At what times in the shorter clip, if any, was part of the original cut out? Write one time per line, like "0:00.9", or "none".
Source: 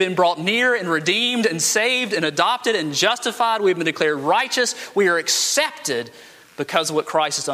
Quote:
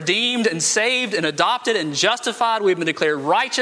none